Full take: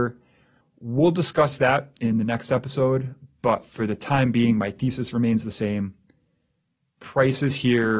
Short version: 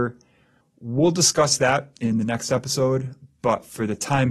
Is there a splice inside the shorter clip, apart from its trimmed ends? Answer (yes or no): no